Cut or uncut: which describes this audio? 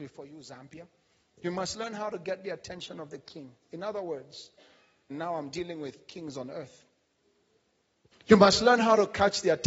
cut